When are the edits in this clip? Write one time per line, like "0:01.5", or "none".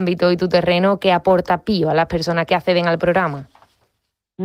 0:02.5

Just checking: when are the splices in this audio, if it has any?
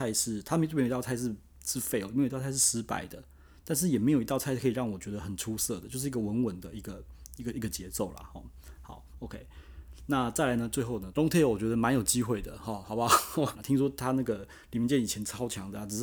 0:11.1
0:13.5

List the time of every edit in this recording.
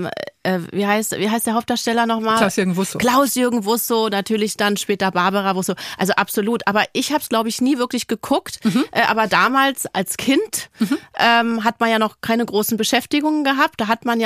none

